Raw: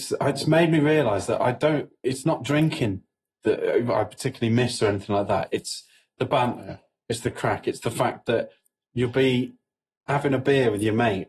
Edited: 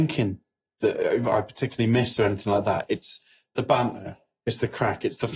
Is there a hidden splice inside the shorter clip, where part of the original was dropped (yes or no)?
no